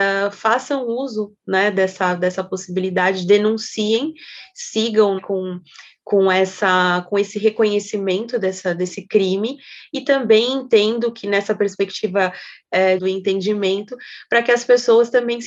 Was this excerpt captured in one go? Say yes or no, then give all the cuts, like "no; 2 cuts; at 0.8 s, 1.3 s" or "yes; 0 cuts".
no; 2 cuts; at 5.2 s, 13.0 s